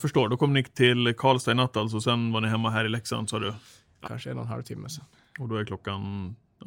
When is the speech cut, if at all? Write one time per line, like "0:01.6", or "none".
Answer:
0:04.0